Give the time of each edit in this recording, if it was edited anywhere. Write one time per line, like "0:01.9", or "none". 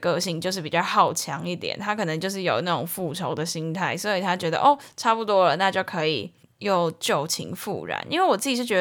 0:06.5